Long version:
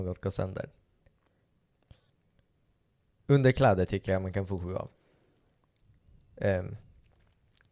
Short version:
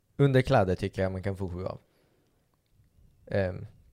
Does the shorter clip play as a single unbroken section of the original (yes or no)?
yes